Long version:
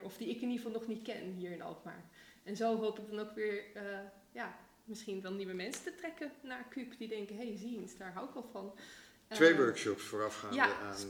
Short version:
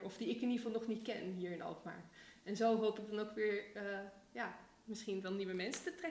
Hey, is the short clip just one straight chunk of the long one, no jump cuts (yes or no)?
yes